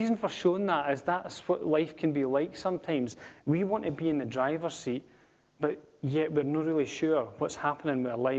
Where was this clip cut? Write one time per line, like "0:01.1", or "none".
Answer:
none